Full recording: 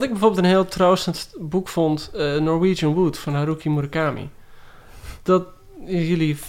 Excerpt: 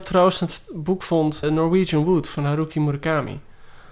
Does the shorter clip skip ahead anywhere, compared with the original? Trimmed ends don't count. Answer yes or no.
yes